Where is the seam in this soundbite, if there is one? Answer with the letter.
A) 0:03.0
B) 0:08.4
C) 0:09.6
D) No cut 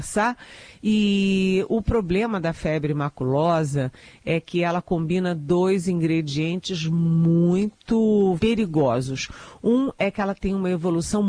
B